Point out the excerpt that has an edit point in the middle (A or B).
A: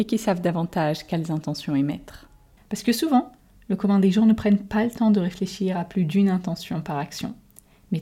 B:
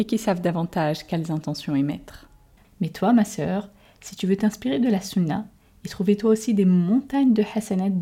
B